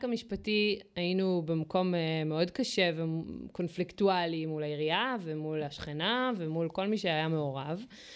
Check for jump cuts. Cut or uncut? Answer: uncut